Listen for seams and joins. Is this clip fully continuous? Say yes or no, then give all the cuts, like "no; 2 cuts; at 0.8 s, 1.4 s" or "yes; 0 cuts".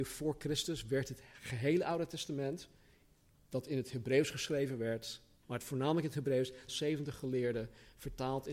no; 2 cuts; at 5.4 s, 6.7 s